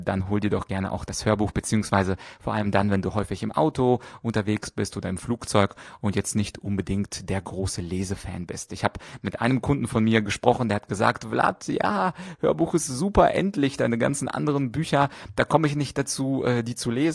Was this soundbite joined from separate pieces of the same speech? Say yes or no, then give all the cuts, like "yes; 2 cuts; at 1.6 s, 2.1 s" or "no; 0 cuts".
no; 0 cuts